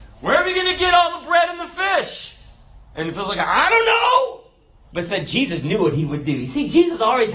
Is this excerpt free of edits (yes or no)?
yes